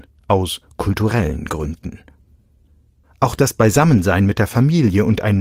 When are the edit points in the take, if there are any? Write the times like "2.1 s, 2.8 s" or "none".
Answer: 3.0 s